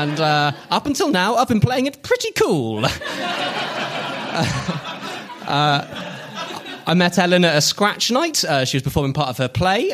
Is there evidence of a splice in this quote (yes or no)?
no